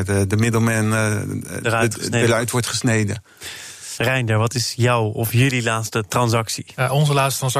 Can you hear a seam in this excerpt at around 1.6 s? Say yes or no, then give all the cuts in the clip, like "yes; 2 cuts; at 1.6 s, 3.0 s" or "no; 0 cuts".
no; 1 cut; at 3.9 s